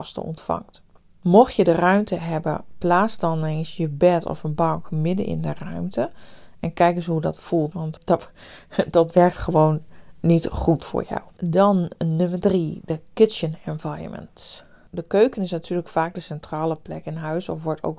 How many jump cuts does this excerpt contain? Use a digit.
1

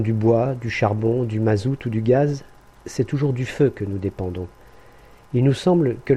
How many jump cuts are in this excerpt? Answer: 0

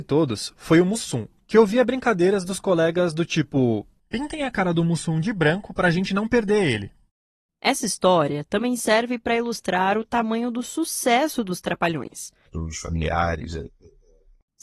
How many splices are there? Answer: 1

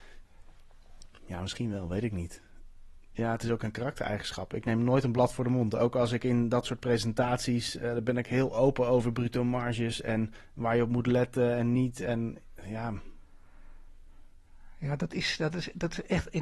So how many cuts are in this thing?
0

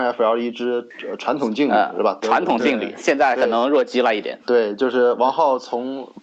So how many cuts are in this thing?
0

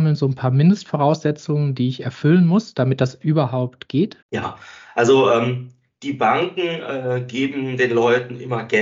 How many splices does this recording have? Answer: 1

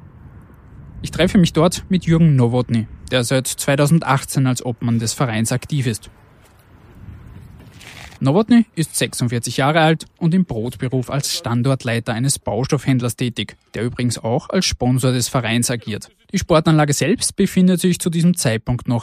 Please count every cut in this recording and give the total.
1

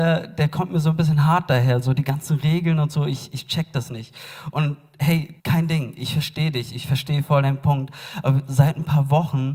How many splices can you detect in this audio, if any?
1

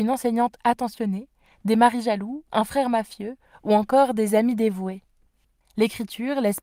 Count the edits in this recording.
1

